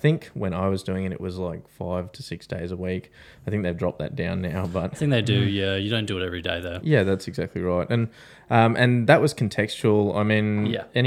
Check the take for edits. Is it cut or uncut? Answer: cut